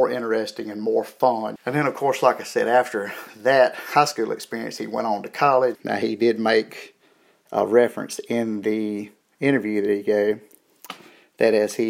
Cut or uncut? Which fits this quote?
cut